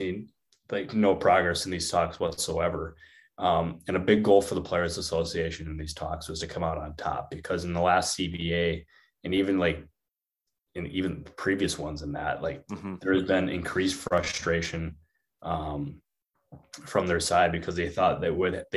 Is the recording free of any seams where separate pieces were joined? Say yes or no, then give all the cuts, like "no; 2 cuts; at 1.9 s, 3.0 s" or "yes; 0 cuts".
yes; 0 cuts